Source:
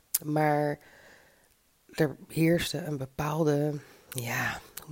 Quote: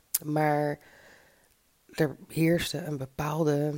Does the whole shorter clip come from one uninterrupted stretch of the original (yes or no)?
yes